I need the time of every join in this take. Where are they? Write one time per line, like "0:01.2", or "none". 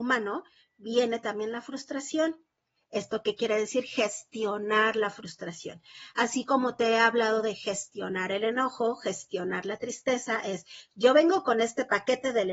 0:02.8